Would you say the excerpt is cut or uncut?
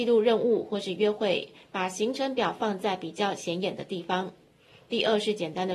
uncut